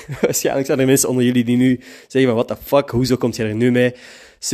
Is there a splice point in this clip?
no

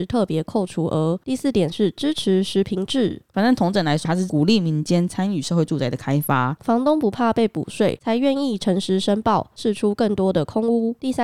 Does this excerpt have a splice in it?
yes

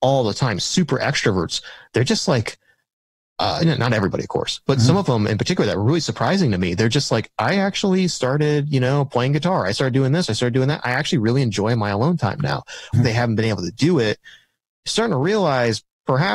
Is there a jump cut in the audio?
yes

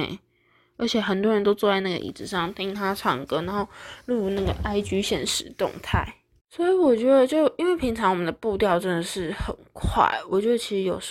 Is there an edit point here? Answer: no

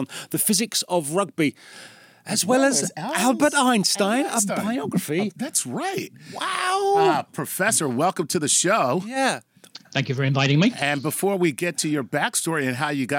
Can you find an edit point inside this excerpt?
no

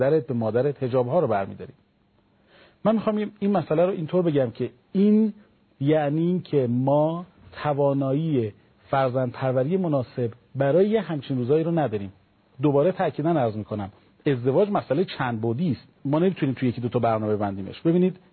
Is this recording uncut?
no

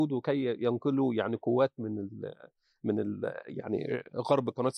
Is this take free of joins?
yes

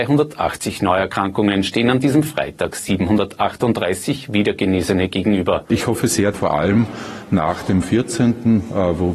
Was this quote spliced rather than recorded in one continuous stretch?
yes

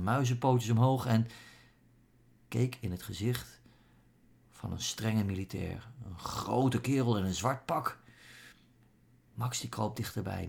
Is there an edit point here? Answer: yes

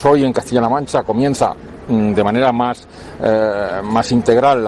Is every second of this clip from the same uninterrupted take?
yes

